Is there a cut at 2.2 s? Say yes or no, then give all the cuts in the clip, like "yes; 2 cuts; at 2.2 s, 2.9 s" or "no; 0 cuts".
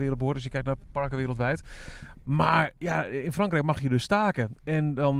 no; 0 cuts